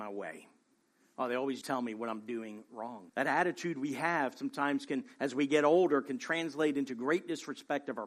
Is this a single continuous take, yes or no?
no